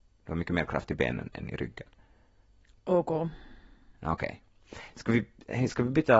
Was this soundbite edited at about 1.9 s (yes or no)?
no